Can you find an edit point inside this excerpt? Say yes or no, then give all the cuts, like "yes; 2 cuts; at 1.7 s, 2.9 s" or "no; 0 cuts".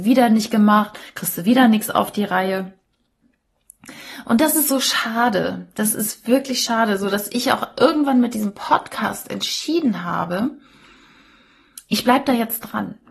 no; 0 cuts